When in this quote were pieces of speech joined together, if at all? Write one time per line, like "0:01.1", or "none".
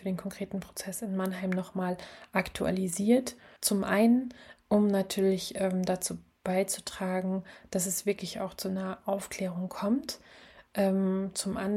0:03.6

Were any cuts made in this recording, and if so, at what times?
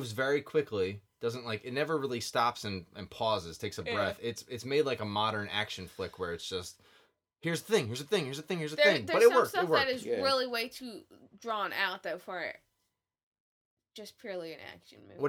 none

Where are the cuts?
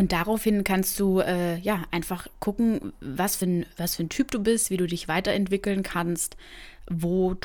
none

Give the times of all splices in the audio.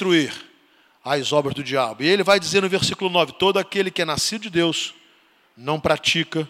none

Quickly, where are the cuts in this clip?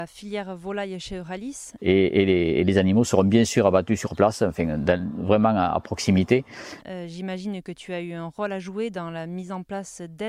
0:01.8
0:06.8

